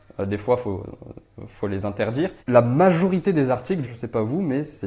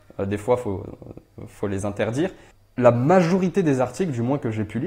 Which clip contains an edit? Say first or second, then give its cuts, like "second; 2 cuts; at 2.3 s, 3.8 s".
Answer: first; 2 cuts; at 2.4 s, 3.8 s